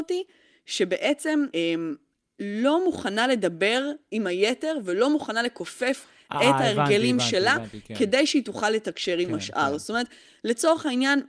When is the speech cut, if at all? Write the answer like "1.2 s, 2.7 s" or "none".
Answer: 1.5 s